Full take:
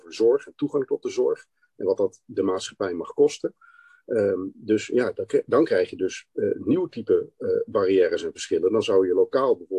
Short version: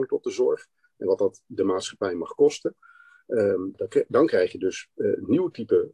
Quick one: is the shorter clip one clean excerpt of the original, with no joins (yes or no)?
no